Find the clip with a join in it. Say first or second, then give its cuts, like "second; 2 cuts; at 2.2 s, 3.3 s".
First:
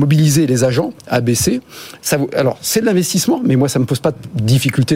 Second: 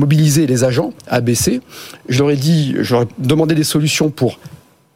first; 1 cut; at 2.0 s